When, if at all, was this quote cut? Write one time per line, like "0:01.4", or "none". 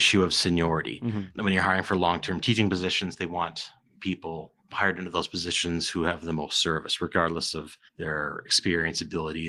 0:07.9